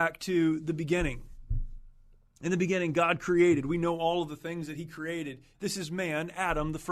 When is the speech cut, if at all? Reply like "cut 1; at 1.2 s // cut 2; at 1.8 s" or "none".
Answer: cut 1; at 5.5 s